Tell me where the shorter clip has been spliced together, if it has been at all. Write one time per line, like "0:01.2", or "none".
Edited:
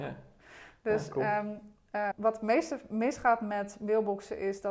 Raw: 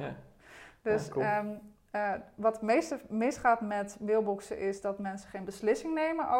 0:02.1